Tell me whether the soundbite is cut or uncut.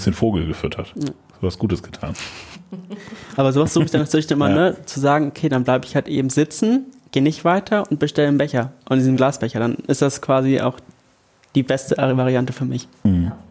uncut